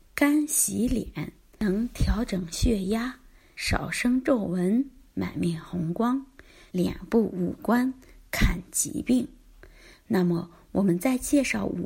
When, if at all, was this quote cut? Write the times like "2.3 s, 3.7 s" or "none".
6.7 s